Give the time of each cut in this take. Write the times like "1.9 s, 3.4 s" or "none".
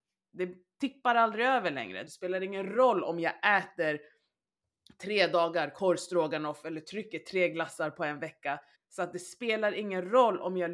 2.1 s, 8.7 s